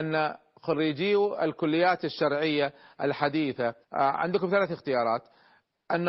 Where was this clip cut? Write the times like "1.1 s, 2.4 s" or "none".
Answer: 3.8 s